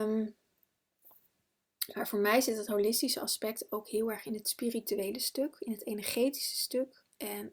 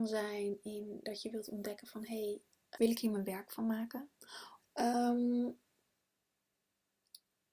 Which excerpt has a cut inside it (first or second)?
second